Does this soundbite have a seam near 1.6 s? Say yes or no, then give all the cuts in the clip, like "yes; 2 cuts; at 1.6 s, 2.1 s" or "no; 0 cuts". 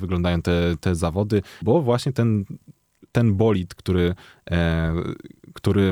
yes; 1 cut; at 1.6 s